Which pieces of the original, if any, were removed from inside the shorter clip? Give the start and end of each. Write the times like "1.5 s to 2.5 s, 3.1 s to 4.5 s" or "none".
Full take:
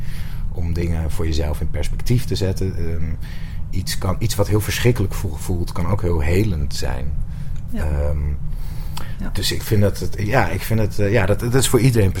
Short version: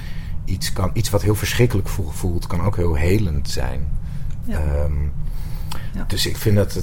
none